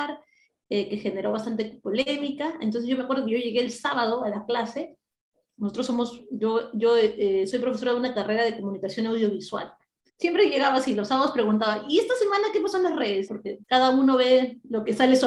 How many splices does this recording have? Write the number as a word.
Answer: two